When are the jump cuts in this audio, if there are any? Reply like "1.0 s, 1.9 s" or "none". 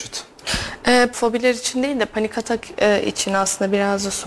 1.1 s